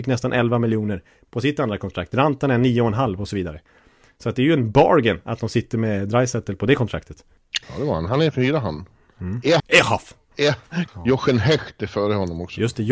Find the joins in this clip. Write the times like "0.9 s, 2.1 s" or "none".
7.6 s, 9.6 s, 10.9 s